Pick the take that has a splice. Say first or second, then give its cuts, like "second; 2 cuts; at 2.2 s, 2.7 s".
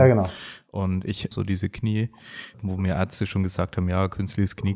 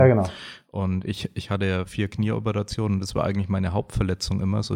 first; 2 cuts; at 1.3 s, 2.5 s